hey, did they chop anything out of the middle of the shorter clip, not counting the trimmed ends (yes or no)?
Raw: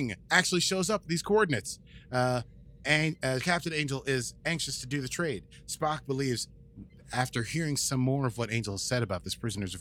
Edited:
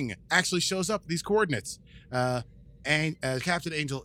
no